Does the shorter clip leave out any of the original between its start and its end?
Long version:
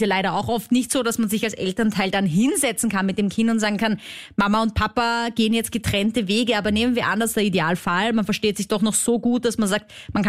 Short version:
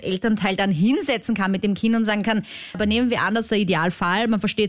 yes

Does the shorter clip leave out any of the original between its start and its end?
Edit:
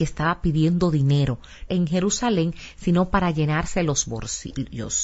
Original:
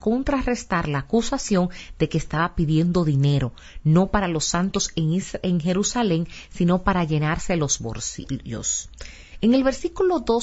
yes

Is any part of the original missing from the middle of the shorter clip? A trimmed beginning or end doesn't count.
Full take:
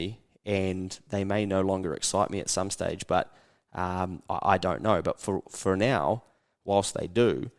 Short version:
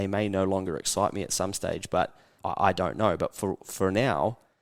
yes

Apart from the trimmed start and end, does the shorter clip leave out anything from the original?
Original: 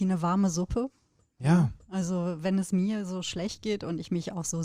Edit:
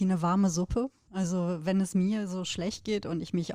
yes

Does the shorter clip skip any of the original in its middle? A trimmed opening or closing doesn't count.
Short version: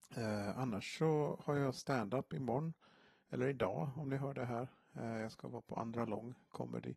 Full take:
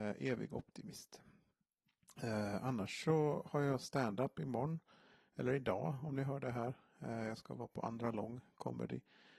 no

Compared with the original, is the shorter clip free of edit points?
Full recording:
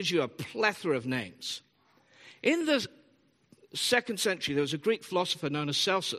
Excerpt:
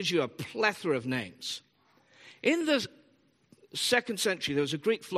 yes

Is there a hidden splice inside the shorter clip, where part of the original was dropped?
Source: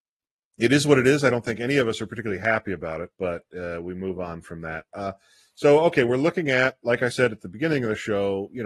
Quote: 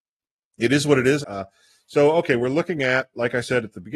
yes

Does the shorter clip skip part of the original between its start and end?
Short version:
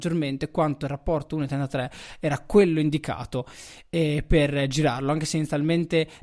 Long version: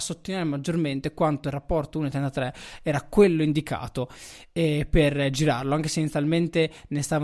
no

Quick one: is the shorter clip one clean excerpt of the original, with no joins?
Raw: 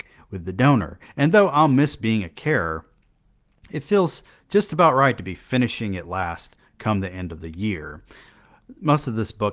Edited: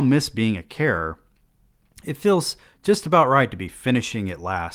yes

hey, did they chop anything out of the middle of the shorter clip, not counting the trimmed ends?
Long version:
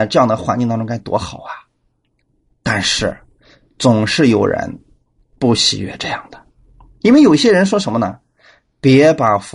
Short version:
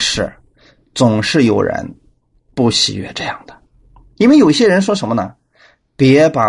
no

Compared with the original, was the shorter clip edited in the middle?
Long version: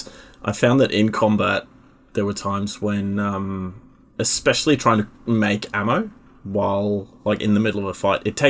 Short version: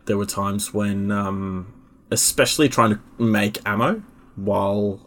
no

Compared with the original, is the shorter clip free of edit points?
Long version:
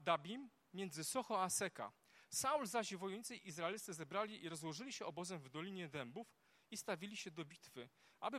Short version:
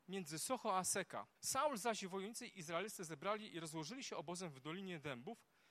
no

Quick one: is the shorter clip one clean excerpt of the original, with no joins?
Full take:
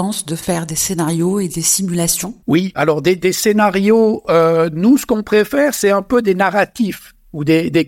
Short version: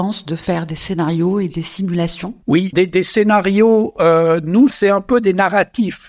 no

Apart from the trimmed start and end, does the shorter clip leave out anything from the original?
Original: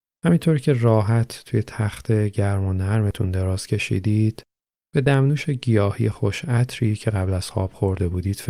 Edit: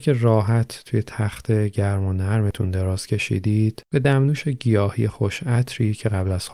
yes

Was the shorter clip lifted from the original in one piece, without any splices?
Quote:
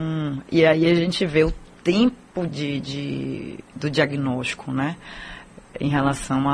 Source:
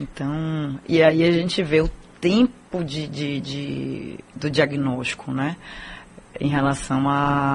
no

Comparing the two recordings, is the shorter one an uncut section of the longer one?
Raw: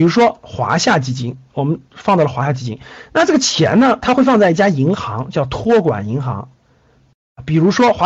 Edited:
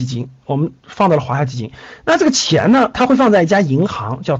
yes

